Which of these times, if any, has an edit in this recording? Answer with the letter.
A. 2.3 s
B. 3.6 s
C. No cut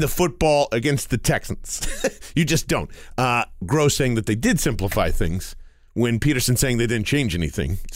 B